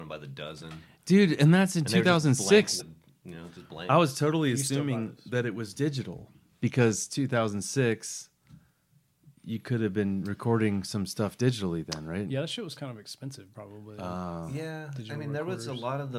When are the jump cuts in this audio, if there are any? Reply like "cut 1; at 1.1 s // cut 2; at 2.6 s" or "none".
cut 1; at 2.8 s // cut 2; at 9.4 s // cut 3; at 12.8 s